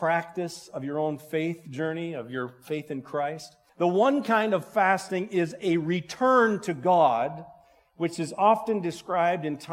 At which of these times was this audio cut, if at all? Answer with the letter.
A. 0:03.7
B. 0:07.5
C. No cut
A